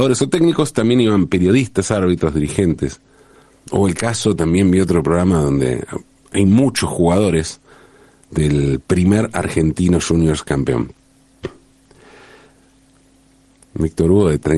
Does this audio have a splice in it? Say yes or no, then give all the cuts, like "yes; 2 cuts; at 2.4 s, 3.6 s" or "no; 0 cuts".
yes; 1 cut; at 13.6 s